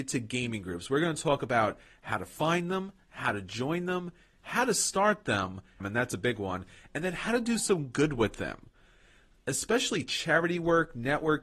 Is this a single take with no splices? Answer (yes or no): no